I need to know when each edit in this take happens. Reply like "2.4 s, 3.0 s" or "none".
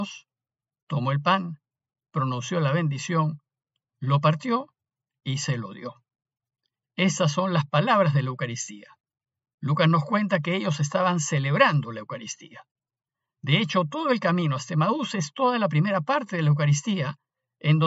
none